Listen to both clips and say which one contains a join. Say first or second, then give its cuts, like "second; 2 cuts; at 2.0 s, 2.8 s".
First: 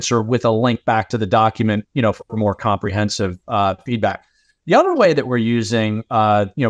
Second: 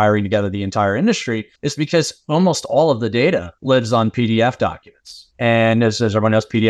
second; 1 cut; at 1.6 s